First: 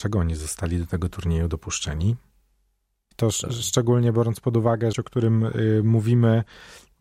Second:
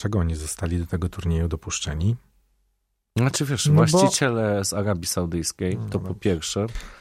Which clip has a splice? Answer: first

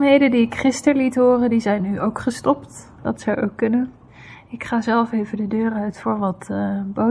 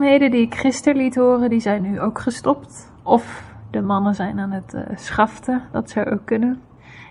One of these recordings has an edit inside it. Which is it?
first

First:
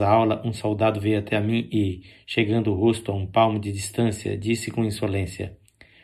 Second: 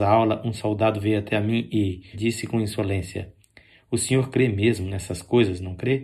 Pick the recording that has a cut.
second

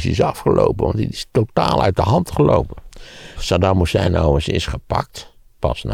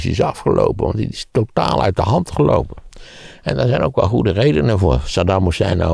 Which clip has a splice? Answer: first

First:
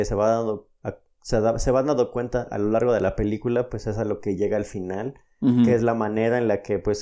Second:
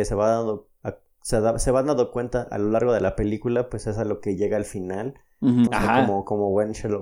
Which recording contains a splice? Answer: second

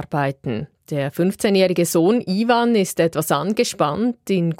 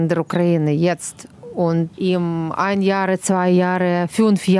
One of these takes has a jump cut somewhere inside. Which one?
second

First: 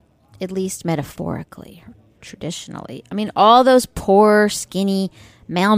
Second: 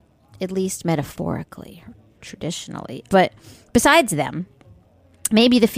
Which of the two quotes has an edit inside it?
second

